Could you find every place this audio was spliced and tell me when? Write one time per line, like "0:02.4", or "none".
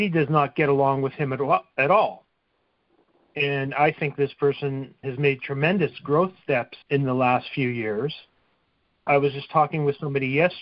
0:05.0
0:06.8
0:09.1